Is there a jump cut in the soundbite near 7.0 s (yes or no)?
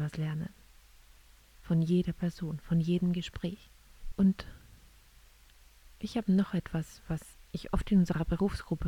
no